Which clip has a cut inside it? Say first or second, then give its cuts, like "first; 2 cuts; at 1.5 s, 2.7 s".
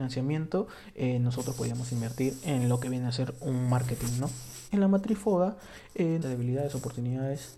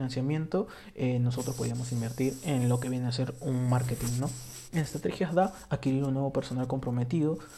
first; 2 cuts; at 4.7 s, 6.2 s